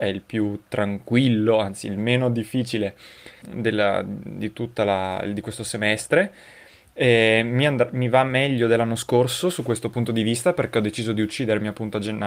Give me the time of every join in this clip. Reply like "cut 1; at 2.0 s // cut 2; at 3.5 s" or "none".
cut 1; at 3.4 s